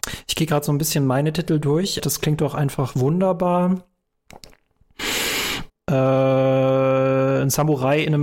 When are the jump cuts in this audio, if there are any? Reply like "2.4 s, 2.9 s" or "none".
2.0 s, 5.7 s